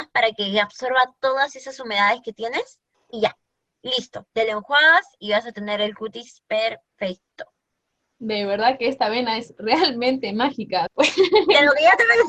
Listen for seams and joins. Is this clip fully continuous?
no; 1 cut; at 10.9 s

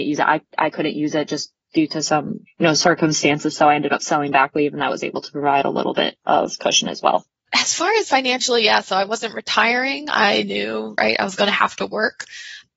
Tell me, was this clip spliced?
no; 0 cuts

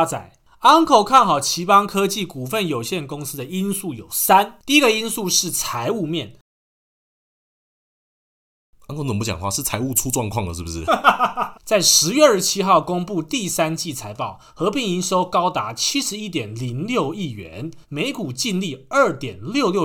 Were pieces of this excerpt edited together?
yes; 2 cuts; at 11.5 s, 17.8 s

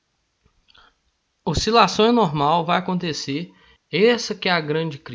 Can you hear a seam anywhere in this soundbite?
yes; 1 cut; at 3.8 s

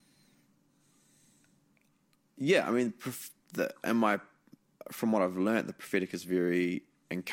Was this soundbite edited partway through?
no; 0 cuts

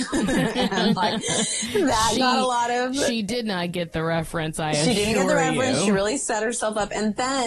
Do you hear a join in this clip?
no; 0 cuts

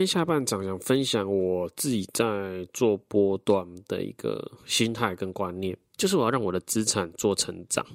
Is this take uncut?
no; 1 cut; at 5.9 s

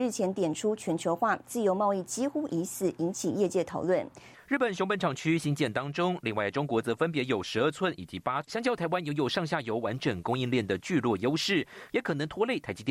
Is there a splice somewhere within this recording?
yes; 3 cuts; at 4.3 s, 8.4 s, 11.9 s

